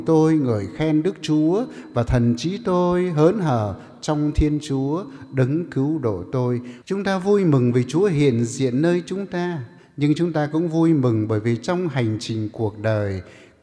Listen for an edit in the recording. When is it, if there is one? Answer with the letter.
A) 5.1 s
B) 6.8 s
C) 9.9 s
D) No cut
B